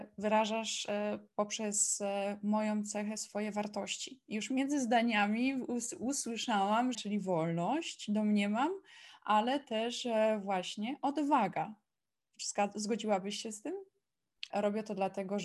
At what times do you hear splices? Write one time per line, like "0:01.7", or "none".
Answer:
0:06.9
0:14.5